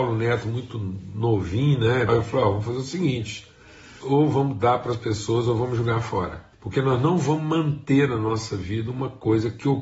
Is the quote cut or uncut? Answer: cut